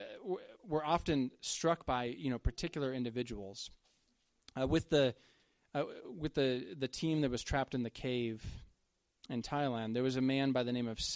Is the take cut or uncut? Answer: uncut